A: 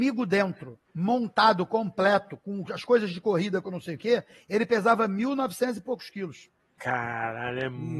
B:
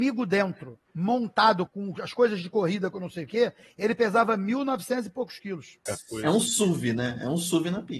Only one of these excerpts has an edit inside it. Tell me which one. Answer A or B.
B